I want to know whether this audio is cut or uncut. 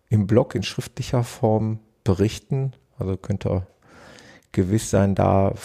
uncut